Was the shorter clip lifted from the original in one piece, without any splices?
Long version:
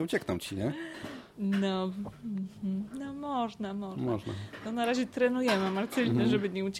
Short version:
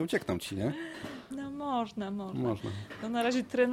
no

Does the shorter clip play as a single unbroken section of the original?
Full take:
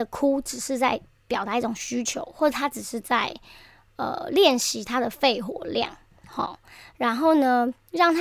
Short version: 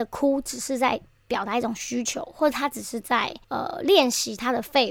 no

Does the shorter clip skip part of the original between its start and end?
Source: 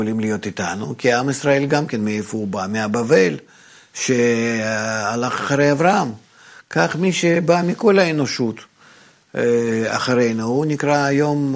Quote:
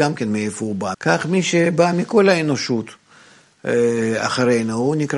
yes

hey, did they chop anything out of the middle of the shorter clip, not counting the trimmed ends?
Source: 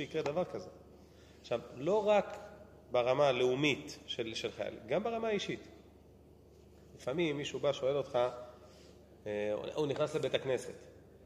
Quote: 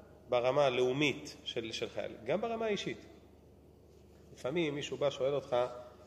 no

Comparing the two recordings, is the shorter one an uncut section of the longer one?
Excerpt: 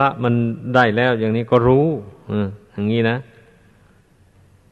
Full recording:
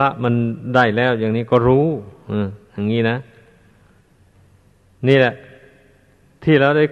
yes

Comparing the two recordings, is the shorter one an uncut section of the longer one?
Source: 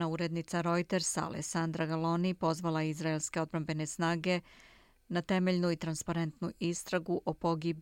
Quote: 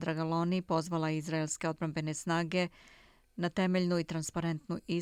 yes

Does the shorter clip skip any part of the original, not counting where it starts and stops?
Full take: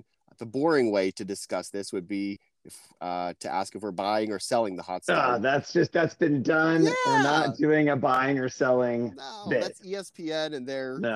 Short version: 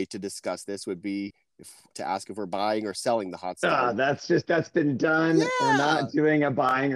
yes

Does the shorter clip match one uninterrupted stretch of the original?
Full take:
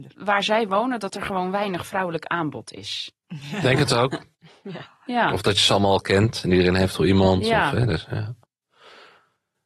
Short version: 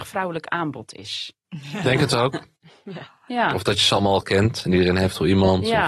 yes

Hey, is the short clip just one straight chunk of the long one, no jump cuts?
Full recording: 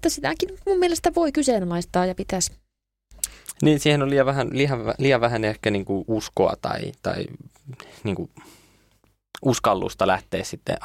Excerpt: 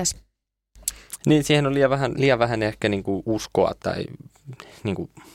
no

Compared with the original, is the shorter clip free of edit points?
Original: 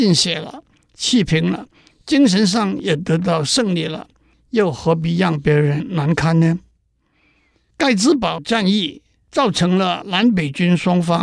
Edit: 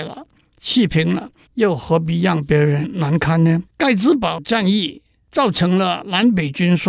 no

